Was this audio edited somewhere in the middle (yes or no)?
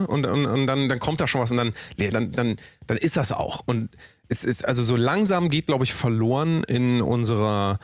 yes